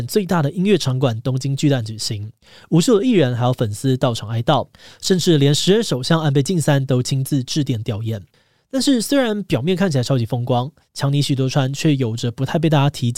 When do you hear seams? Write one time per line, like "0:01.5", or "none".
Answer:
none